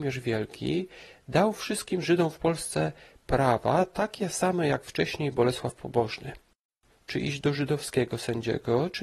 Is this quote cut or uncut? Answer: cut